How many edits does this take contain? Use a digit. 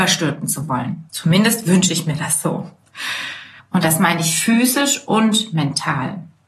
2